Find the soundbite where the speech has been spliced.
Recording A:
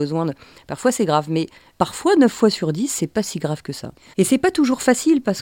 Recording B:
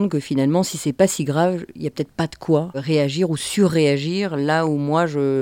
A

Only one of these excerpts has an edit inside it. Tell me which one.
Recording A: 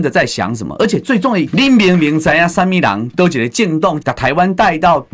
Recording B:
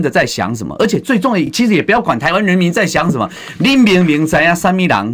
A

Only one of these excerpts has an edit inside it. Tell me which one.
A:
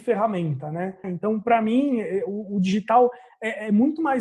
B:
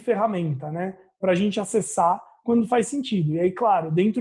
A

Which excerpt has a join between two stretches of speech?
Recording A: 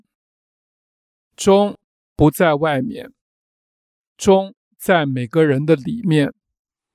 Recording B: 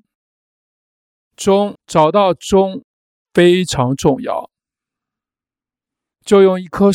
B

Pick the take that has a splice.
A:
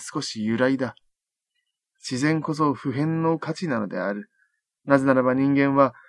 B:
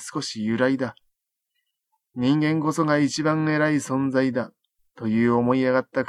A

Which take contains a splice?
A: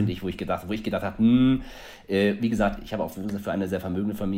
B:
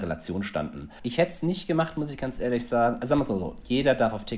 B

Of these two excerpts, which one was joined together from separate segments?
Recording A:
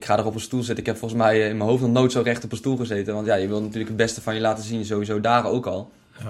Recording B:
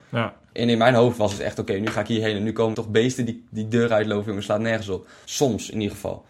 B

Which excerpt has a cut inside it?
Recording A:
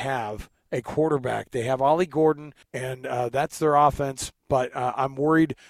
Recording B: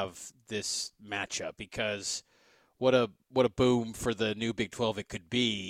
A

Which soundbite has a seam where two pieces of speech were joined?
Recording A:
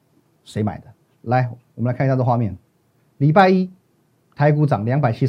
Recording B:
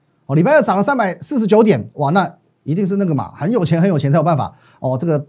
A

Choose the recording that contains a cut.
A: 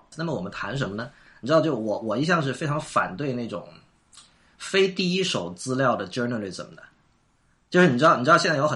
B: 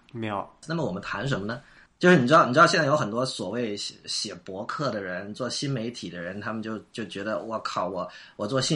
B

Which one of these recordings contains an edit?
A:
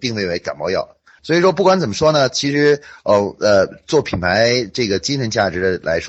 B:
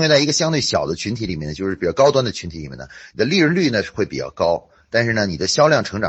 A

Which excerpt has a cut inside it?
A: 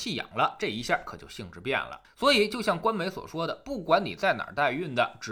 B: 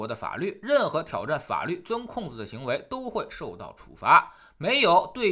A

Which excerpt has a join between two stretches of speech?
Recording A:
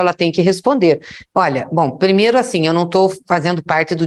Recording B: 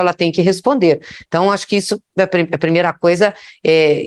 A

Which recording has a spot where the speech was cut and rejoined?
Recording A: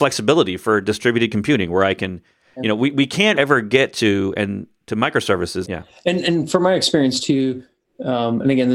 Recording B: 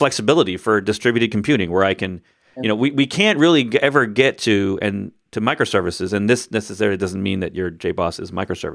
A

